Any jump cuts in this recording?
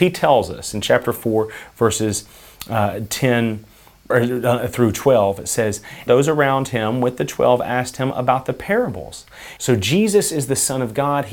yes; 3 cuts; at 4.1 s, 6.1 s, 9.6 s

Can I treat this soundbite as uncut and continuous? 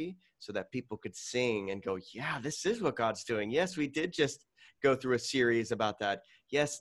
yes; 0 cuts

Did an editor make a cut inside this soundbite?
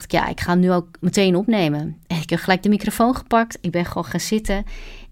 no; 0 cuts

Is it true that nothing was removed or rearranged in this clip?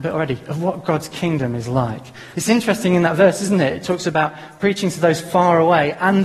no; 1 cut; at 2.3 s

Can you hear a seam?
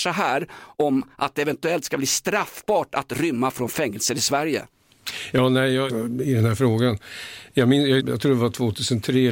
yes; 2 cuts; at 5.9 s, 8.0 s

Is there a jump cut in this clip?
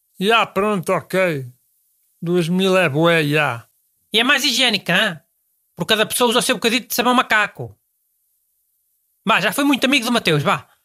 no; 0 cuts

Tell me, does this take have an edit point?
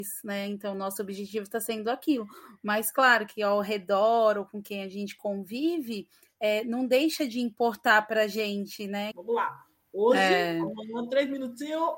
yes; 1 cut; at 9.1 s

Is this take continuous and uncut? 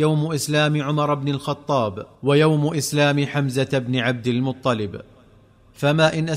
no; 1 cut; at 2.1 s

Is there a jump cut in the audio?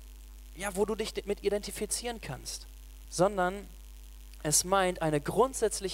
yes; 1 cut; at 3.0 s

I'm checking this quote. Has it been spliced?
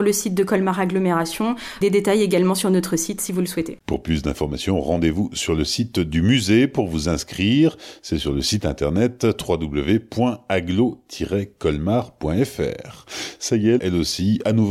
yes; 1 cut; at 13.8 s

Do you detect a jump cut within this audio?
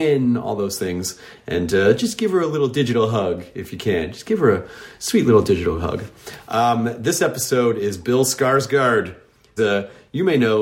yes; 1 cut; at 9.6 s

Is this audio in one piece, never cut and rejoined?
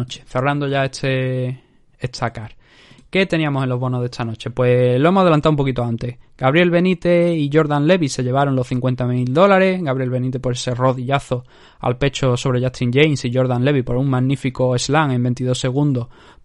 yes; 0 cuts

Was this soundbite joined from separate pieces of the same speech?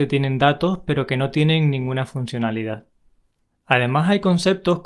no; 0 cuts

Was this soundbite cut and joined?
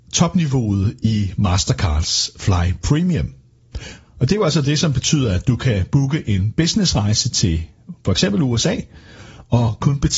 no; 0 cuts

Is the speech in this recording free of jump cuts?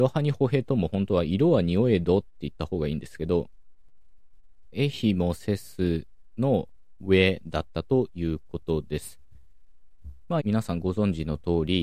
no; 3 cuts; at 4.7 s, 7.0 s, 10.4 s

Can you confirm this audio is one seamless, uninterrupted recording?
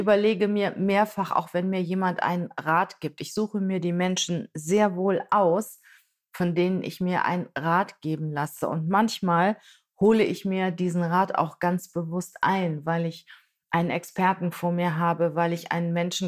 yes; 0 cuts

